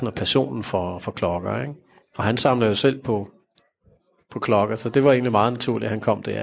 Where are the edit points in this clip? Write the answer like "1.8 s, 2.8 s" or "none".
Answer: none